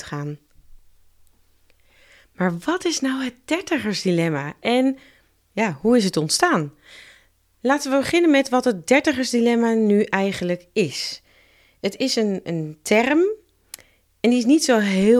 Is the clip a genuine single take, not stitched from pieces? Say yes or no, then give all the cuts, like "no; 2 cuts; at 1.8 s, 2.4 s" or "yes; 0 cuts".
yes; 0 cuts